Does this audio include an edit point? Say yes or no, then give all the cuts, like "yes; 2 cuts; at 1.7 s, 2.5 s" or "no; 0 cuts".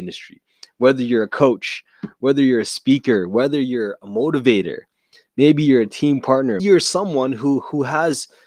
yes; 1 cut; at 6.6 s